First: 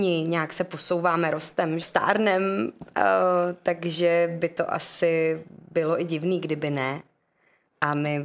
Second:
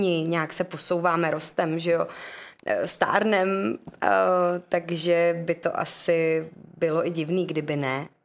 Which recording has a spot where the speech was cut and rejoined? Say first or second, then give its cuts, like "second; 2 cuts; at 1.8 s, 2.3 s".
first; 1 cut; at 1.8 s